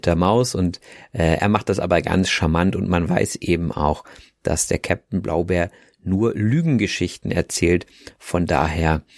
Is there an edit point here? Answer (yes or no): no